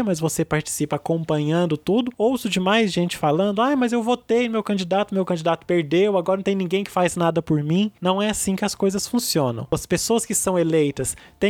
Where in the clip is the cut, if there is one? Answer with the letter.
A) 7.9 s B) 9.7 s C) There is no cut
C